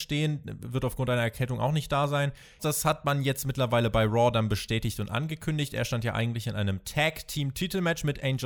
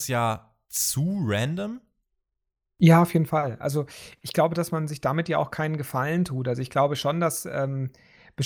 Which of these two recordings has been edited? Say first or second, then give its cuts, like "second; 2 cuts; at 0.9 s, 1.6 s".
first; 1 cut; at 2.6 s